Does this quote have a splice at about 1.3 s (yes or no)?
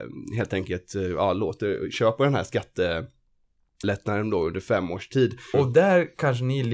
no